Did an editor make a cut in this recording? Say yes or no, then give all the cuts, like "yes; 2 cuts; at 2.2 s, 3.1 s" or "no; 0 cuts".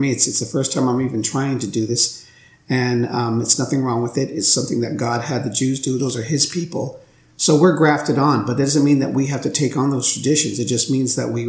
no; 0 cuts